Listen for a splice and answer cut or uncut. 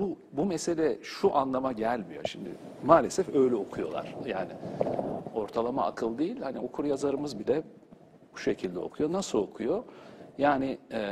uncut